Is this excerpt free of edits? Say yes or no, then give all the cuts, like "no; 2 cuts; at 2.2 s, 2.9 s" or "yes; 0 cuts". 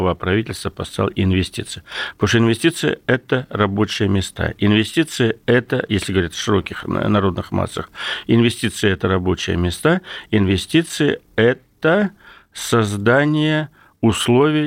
yes; 0 cuts